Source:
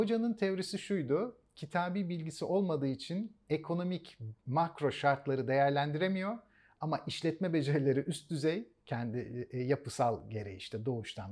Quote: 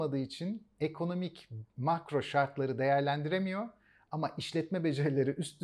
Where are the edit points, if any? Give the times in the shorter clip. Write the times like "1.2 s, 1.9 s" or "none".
none